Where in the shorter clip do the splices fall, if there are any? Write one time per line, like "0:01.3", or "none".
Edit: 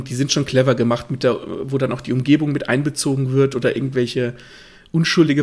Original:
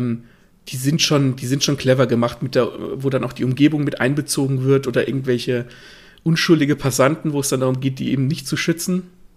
none